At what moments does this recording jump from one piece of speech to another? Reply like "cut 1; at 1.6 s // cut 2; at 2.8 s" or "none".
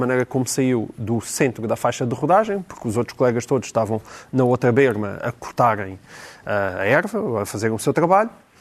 cut 1; at 5.2 s